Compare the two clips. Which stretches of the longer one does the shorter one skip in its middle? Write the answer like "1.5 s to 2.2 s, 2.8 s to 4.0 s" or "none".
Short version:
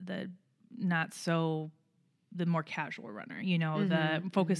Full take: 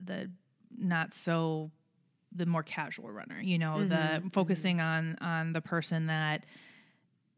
none